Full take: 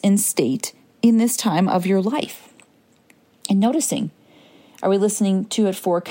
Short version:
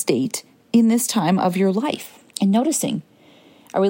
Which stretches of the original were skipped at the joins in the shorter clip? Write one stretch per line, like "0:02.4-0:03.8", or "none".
0:02.6-0:03.4